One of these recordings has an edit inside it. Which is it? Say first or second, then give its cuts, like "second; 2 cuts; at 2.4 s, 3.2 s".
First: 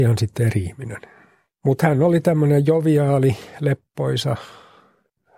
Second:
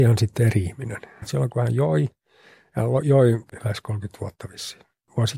second; 1 cut; at 1.2 s